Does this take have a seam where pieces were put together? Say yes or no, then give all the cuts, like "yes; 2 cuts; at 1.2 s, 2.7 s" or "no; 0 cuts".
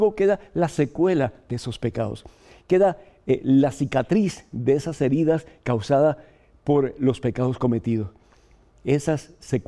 no; 0 cuts